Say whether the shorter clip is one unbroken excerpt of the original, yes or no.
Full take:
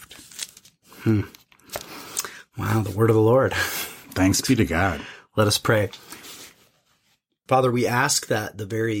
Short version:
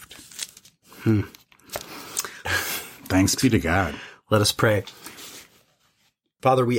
no